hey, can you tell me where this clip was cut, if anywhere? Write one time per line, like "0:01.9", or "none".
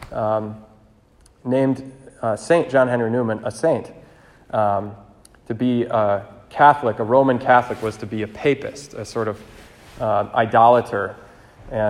0:04.4